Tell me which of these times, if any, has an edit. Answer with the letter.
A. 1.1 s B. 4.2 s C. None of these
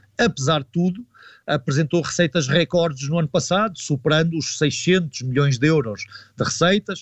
C